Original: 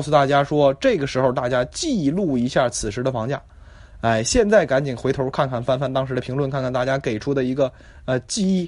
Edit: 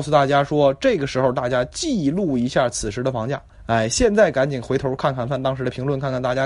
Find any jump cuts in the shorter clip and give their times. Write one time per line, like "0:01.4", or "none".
0:03.5
0:05.3